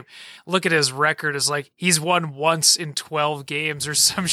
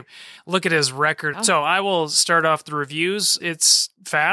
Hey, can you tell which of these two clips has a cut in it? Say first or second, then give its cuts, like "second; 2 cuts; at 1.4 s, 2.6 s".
second; 2 cuts; at 1.3 s, 3.4 s